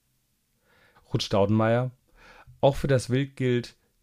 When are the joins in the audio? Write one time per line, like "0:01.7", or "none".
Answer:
0:00.9